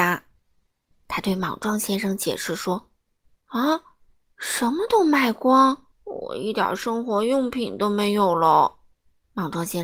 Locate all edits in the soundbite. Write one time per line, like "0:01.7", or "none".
0:00.9
0:05.9